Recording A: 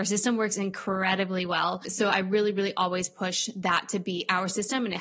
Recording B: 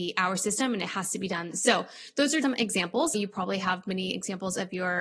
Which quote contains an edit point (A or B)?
B